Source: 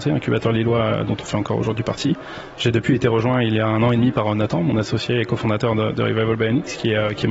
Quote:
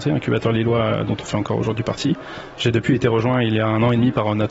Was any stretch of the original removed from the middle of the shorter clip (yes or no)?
no